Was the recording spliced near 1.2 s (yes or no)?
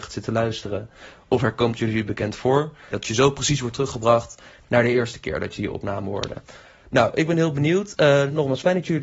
no